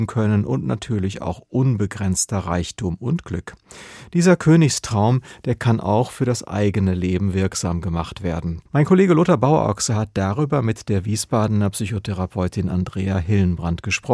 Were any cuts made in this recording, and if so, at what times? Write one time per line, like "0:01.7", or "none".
0:08.7